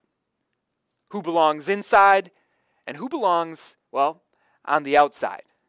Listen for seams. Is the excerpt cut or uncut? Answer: cut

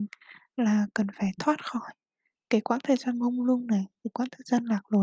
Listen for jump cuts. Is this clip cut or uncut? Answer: cut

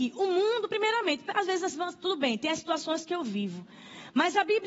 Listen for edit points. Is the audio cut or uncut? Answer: uncut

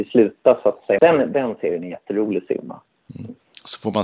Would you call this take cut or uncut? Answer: cut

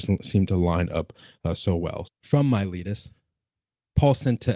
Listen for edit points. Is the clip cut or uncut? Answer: cut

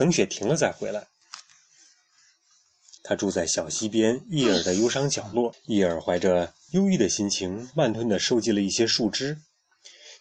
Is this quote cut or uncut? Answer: cut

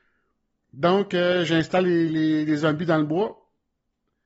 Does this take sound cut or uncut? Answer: uncut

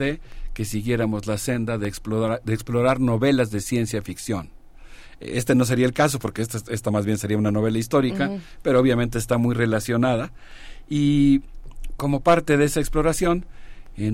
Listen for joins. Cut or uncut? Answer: uncut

